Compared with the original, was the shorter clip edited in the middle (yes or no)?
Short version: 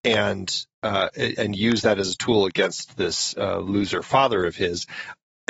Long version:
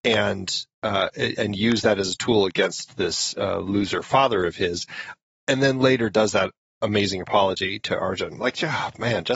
no